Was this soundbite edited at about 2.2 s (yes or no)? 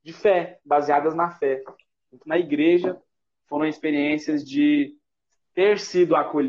yes